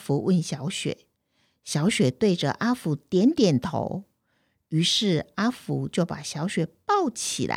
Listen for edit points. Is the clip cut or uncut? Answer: uncut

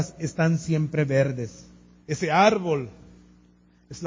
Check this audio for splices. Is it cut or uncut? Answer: cut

